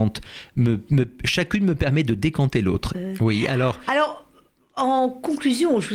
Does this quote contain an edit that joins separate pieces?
yes; 1 cut; at 2.9 s

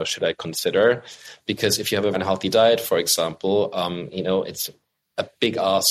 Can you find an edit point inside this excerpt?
yes; 1 cut; at 2.1 s

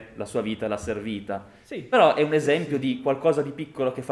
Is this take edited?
no; 0 cuts

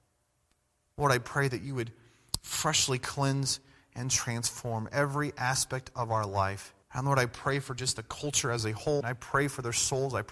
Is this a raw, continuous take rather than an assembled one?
no; 2 cuts; at 6.8 s, 9.0 s

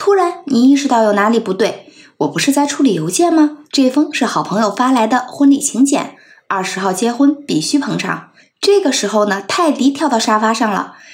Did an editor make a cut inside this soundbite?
yes; 2 cuts; at 3.6 s, 8.4 s

